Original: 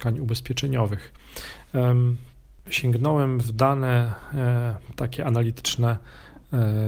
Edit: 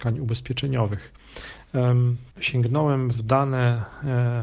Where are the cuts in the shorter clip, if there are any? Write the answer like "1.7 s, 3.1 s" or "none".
2.3 s